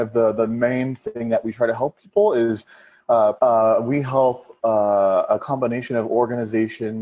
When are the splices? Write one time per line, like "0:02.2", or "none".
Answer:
0:03.4